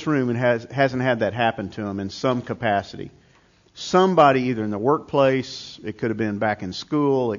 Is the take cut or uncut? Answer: uncut